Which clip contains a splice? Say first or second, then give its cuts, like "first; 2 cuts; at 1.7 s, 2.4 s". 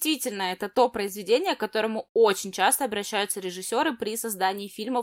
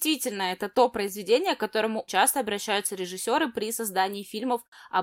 second; 1 cut; at 2.1 s